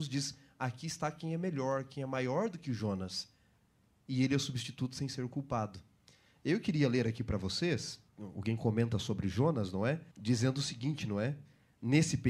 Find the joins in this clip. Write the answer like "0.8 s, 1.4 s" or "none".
8.1 s, 10.1 s